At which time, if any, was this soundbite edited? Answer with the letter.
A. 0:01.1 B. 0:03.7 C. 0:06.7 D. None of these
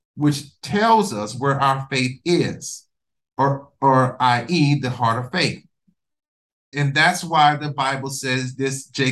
C